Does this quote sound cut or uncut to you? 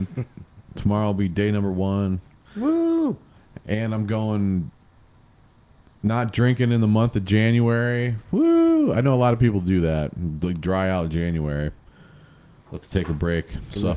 uncut